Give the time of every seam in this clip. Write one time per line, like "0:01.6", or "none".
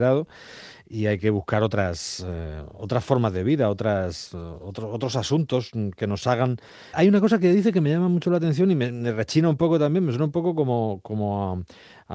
0:06.9